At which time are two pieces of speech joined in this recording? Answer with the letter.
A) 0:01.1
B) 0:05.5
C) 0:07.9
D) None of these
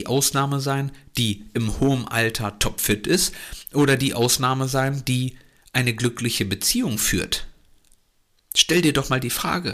D